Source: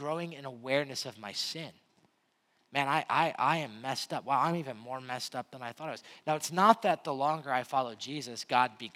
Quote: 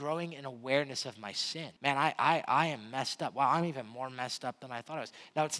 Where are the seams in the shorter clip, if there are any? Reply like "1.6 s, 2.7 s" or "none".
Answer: 1.8 s